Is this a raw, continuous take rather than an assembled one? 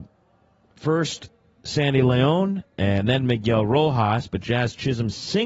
yes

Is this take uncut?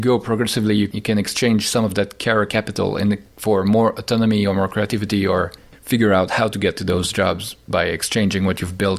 yes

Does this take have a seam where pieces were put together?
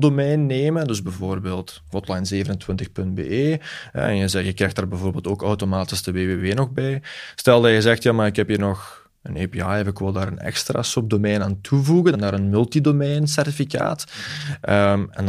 yes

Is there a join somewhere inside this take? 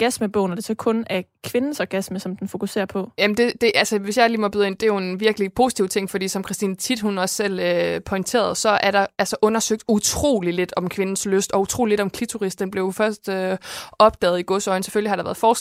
no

